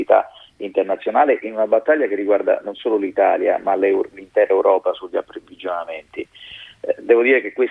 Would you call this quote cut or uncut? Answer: uncut